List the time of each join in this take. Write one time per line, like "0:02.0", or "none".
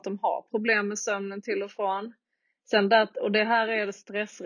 none